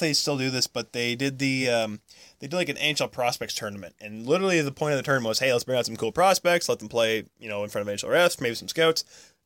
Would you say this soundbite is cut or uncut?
uncut